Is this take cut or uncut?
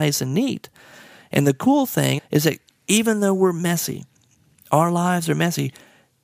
cut